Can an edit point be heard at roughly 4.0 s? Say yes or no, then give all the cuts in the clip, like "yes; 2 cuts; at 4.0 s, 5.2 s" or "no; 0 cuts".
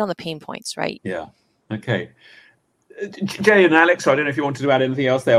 no; 1 cut; at 1.0 s